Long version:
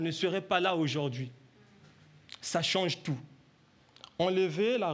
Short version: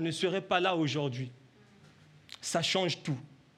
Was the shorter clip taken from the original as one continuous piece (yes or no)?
yes